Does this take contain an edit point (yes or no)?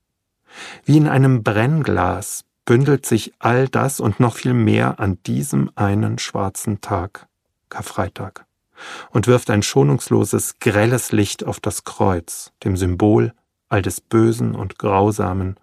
yes